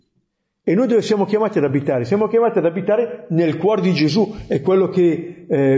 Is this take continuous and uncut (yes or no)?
yes